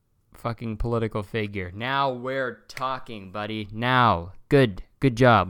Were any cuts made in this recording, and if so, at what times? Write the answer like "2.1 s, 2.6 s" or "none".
none